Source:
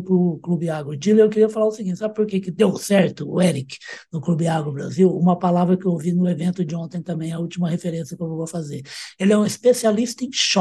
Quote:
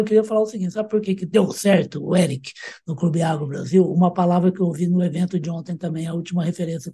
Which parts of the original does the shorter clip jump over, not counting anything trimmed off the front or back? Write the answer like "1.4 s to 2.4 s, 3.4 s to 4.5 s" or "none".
none